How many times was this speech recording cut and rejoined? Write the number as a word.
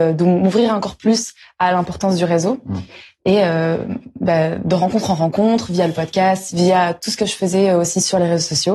one